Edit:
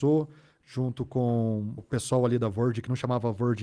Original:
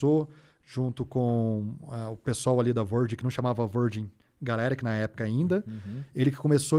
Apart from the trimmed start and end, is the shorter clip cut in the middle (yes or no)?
yes